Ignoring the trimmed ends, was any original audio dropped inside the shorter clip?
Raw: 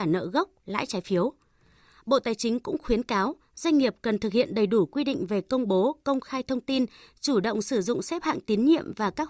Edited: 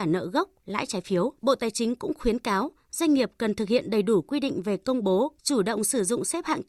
yes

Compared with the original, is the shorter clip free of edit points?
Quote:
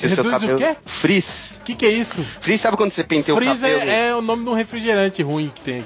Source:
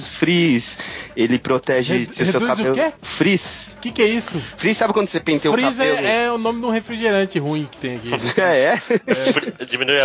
yes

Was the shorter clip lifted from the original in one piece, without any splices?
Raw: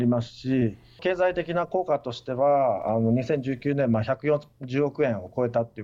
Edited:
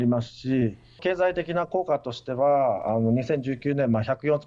yes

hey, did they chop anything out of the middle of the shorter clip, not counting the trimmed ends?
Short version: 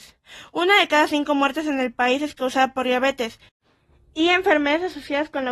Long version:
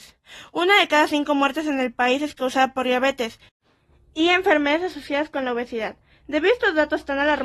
no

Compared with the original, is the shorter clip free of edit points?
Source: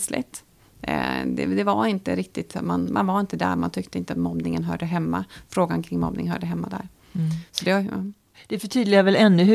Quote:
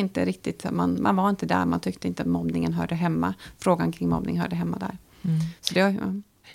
yes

